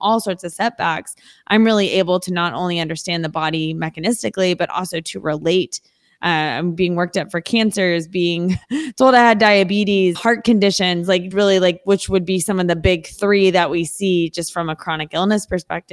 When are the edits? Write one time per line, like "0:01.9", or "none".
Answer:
0:10.1
0:11.3